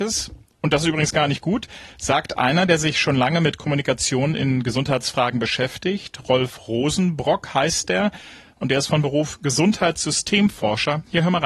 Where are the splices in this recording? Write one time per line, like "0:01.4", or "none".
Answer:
none